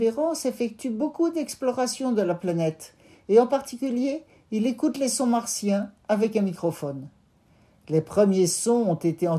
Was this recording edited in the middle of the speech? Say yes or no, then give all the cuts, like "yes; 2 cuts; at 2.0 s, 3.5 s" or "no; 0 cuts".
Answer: no; 0 cuts